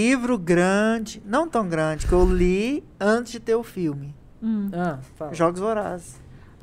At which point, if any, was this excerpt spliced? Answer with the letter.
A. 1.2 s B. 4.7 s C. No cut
C